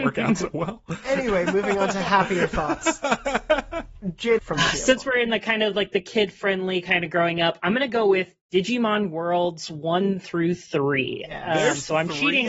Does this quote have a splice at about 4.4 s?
yes; 1 cut; at 4.4 s

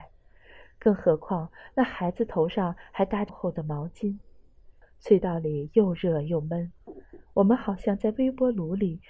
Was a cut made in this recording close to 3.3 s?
yes; 2 cuts; at 3.3 s, 4.8 s

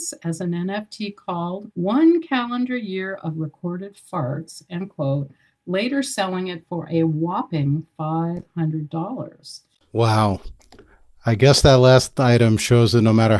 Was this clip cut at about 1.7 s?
yes; 1 cut; at 1.7 s

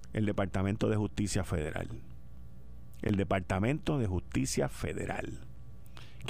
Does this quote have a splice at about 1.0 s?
no; 0 cuts

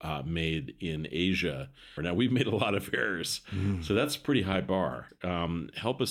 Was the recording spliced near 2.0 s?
yes; 1 cut; at 2.0 s

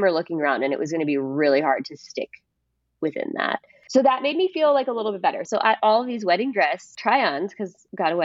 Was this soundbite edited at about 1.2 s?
no; 2 cuts; at 3.9 s, 5.4 s

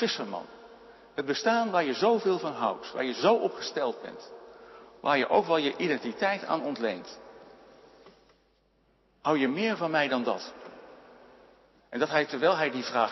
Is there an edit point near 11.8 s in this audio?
yes; 1 cut; at 11.8 s

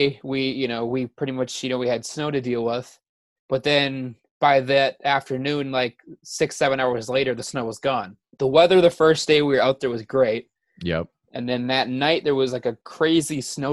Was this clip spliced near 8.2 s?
yes; 1 cut; at 8.2 s

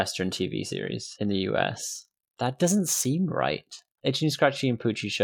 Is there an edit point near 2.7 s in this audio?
no; 2 cuts; at 1.2 s, 4.0 s

